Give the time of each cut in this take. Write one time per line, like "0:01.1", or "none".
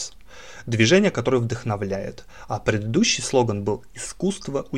none